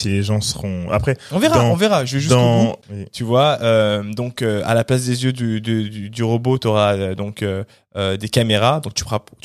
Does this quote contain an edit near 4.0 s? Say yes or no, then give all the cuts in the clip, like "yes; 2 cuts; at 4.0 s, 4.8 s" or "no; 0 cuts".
no; 1 cut; at 2.8 s